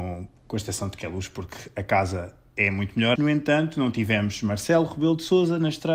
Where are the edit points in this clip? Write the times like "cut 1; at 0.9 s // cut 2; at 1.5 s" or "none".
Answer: cut 1; at 3.2 s